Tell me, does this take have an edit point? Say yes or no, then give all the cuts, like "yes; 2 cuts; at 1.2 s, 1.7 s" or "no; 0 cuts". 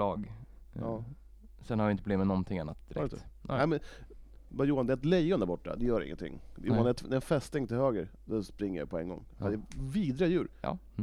no; 0 cuts